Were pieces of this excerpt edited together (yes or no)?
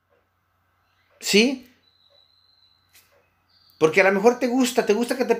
no